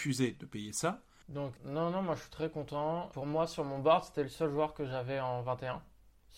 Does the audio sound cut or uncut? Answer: cut